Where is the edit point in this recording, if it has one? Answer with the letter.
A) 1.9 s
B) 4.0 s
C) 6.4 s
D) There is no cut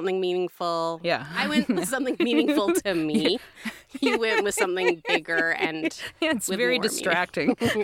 D